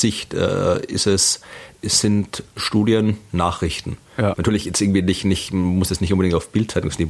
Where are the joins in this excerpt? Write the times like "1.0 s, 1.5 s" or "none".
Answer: 4.3 s